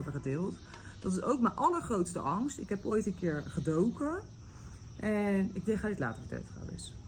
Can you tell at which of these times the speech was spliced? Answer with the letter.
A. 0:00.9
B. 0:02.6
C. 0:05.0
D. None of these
D